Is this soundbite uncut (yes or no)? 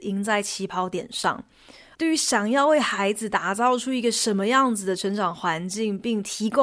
no